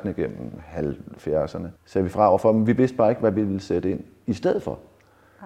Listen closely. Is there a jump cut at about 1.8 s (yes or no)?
yes